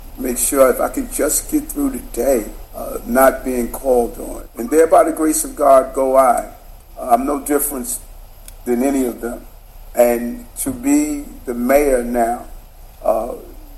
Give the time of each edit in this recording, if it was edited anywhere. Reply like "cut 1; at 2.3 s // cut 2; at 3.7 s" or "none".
none

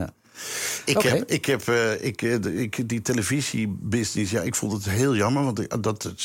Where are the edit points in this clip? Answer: none

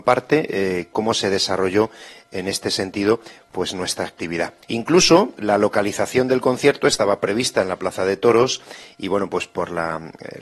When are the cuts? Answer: cut 1; at 0.9 s // cut 2; at 4.6 s

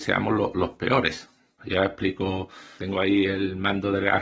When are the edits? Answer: cut 1; at 1.6 s // cut 2; at 2.8 s

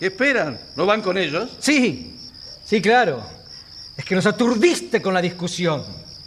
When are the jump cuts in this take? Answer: none

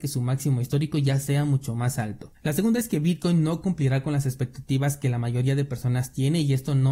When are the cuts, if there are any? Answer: cut 1; at 2.3 s

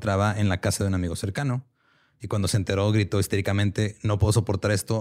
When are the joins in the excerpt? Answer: none

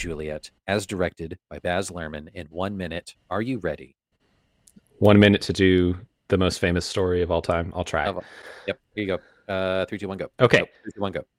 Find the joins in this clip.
cut 1; at 10.3 s

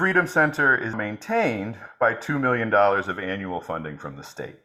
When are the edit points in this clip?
cut 1; at 0.9 s

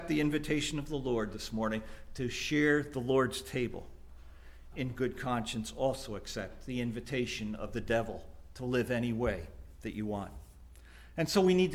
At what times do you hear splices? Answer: cut 1; at 4.7 s

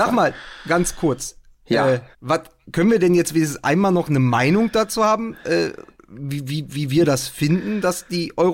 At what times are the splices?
cut 1; at 2.1 s

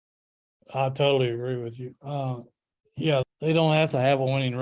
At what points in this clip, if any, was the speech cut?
cut 1; at 3.2 s

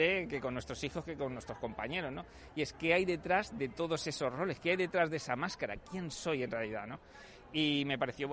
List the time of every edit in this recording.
none

